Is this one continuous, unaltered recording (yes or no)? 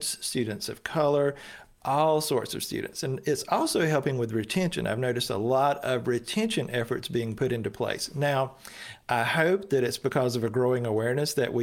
yes